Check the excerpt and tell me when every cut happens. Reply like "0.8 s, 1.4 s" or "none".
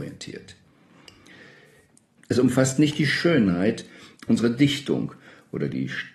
2.2 s